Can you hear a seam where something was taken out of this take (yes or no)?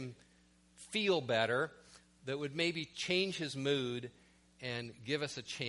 no